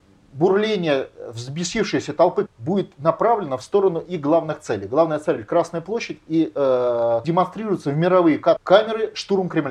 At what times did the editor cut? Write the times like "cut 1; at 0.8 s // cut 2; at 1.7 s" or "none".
cut 1; at 2.5 s // cut 2; at 7.2 s // cut 3; at 8.6 s

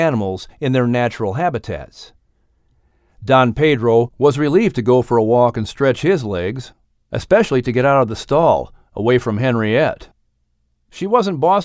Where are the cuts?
none

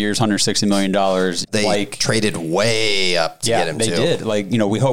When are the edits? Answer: cut 1; at 1.4 s

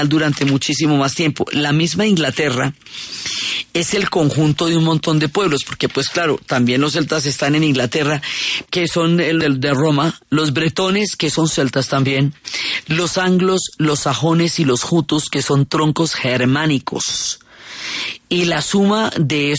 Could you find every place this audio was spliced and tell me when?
cut 1; at 8.6 s

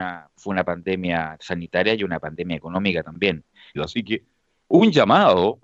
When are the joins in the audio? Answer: cut 1; at 3.8 s

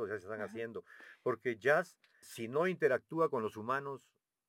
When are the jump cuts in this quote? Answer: cut 1; at 2.2 s

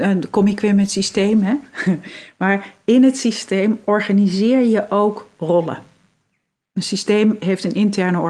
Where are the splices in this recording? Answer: none

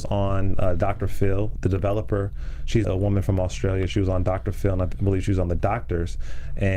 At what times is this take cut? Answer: cut 1; at 1.6 s // cut 2; at 2.8 s

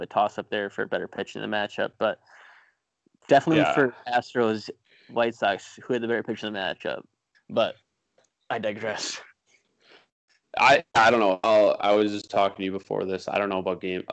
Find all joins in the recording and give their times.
cut 1; at 7.3 s

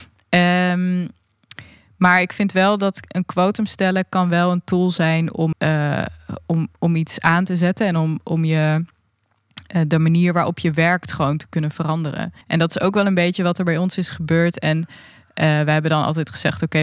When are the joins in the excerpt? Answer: cut 1; at 5.5 s // cut 2; at 12.4 s

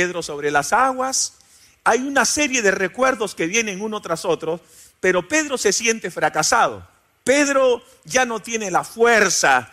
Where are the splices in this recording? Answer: cut 1; at 7.2 s

